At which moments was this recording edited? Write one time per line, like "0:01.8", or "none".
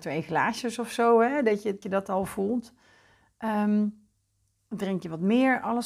0:01.8